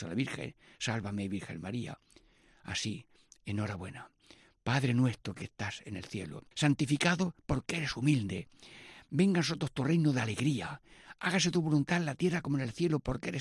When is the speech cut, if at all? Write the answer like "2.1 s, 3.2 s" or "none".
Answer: 6.5 s